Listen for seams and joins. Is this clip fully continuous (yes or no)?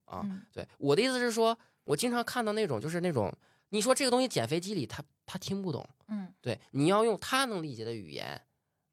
no